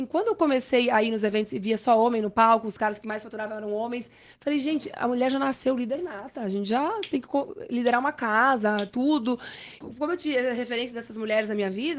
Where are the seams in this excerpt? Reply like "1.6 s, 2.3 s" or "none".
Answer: 9.8 s